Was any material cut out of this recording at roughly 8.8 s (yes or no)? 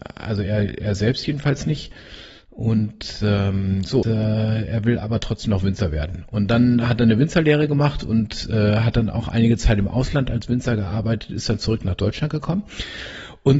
no